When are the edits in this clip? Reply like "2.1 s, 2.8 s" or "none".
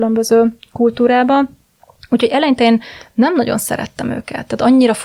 none

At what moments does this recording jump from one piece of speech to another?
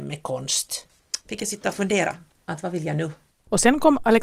none

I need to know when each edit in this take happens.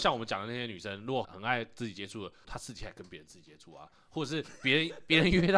1.2 s, 2.4 s

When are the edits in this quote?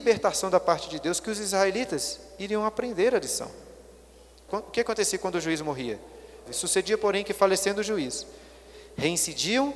4.5 s, 6.5 s

